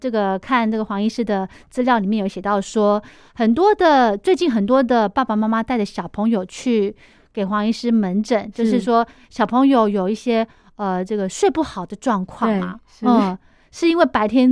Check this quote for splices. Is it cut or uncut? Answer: uncut